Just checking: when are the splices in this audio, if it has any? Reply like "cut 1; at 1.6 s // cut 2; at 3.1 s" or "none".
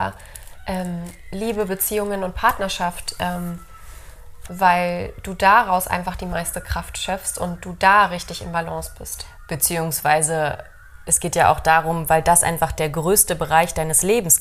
cut 1; at 4.5 s